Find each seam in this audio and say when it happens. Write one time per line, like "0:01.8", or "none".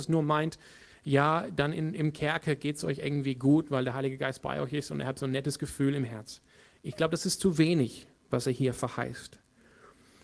none